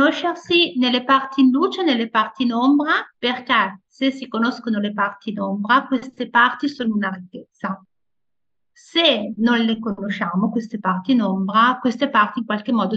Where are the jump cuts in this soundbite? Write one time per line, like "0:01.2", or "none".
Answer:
0:03.1